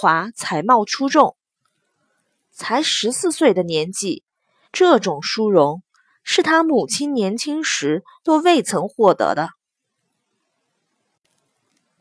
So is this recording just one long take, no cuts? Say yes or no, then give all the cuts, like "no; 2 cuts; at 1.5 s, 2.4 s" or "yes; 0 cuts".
no; 1 cut; at 4.6 s